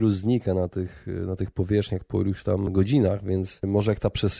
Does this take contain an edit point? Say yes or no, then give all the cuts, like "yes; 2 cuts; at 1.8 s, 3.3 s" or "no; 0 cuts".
no; 0 cuts